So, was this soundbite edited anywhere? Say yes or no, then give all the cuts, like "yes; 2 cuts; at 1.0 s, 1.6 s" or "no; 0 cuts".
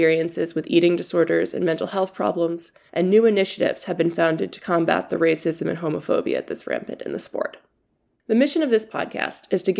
no; 0 cuts